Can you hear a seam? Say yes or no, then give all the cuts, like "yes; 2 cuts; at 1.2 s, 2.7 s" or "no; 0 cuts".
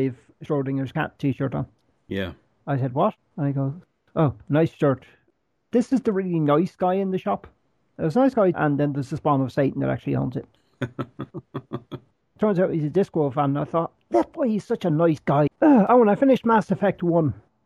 yes; 2 cuts; at 8.5 s, 15.5 s